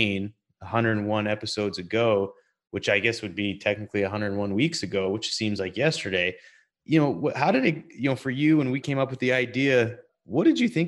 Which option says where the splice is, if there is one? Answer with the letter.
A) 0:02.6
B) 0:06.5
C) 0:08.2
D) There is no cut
D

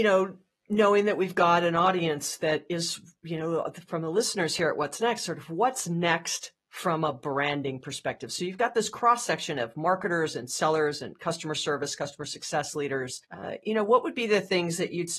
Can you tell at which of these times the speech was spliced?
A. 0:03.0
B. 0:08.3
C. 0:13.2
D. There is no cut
C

